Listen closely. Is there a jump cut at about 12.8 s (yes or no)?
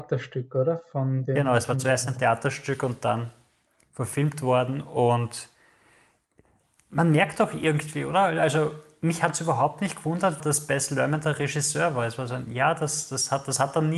no